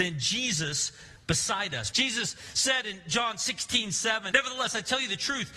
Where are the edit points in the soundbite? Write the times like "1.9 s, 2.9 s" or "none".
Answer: 1.9 s, 4.3 s